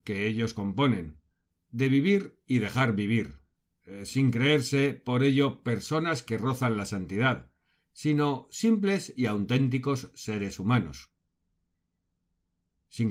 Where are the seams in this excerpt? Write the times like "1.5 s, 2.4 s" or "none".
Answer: none